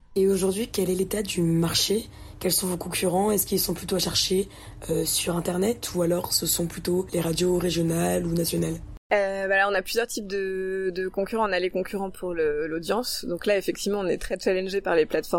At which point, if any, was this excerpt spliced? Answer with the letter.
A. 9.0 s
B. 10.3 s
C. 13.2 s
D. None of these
D